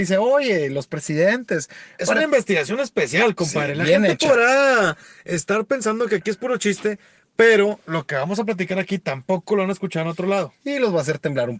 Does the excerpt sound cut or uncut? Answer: uncut